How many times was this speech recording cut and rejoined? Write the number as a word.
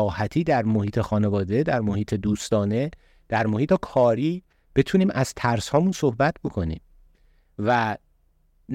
one